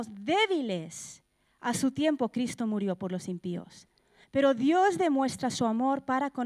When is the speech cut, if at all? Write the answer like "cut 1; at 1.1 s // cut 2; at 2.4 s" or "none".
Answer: cut 1; at 4.2 s